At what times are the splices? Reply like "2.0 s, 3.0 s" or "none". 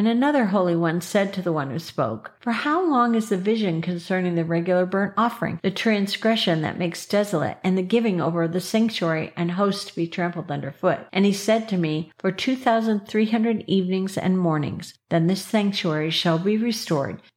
none